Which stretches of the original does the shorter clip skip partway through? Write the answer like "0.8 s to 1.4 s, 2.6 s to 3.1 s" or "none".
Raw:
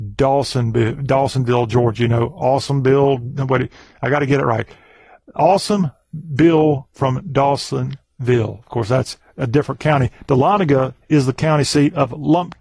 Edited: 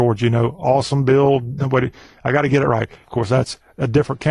4.8 s to 8.6 s